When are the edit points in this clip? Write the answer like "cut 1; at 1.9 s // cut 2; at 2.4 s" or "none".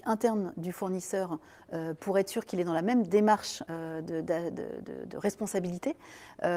none